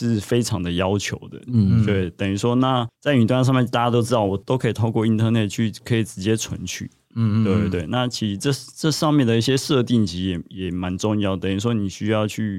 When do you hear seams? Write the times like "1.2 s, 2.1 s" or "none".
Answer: none